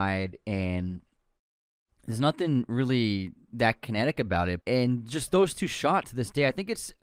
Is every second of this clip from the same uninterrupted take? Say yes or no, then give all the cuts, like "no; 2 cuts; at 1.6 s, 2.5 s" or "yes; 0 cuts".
no; 2 cuts; at 4.6 s, 6.0 s